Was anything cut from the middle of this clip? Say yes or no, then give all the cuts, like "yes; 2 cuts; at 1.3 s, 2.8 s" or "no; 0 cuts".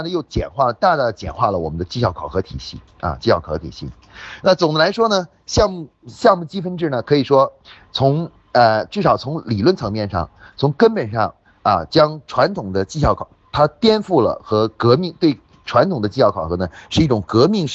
no; 0 cuts